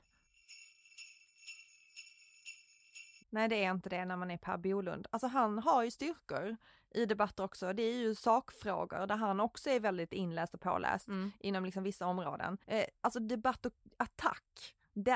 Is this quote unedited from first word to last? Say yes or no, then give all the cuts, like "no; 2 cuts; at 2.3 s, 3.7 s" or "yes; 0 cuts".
no; 2 cuts; at 3.2 s, 12.6 s